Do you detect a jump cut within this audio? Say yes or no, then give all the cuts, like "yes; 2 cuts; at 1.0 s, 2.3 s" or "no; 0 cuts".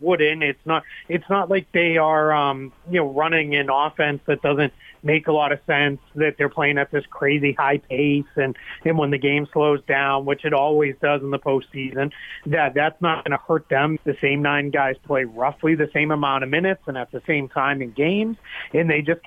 yes; 1 cut; at 14.0 s